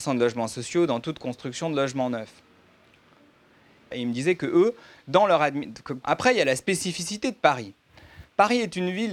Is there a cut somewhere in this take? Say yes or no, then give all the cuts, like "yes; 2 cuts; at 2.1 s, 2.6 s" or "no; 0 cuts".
yes; 2 cuts; at 3.9 s, 6.0 s